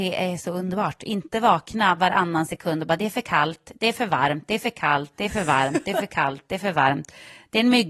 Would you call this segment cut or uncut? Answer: uncut